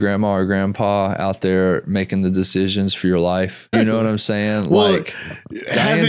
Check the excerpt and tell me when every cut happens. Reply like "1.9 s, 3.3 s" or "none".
3.7 s